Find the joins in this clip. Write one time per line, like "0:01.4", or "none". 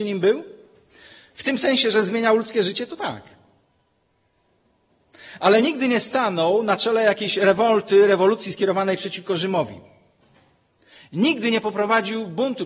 none